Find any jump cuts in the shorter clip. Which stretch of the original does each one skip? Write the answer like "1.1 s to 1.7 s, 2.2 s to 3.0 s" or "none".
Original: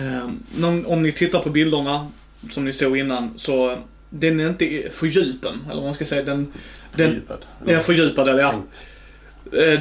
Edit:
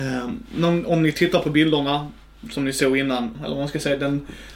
3.3 s to 5.6 s